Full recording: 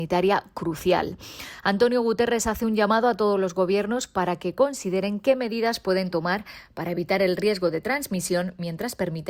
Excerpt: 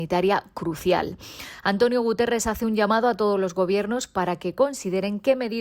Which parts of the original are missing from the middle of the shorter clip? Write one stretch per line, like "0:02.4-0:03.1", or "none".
none